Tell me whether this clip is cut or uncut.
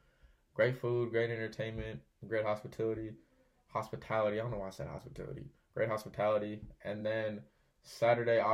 uncut